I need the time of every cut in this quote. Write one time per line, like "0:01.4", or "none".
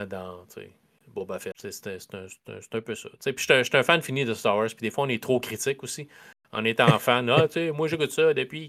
0:01.5